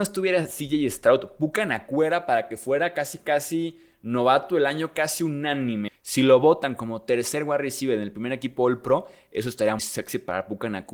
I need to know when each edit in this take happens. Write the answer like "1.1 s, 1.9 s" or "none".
5.9 s, 9.8 s